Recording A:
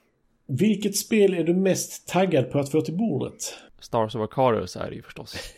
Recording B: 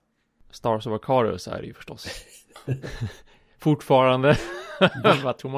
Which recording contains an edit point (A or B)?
A